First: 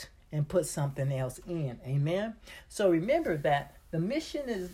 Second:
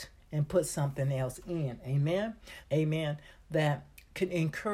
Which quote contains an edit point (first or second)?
second